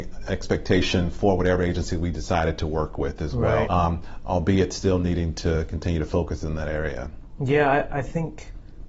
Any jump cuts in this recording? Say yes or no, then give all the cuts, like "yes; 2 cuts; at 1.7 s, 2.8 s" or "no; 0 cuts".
yes; 1 cut; at 3.7 s